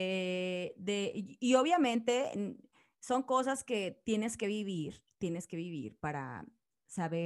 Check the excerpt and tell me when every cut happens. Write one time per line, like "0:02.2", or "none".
none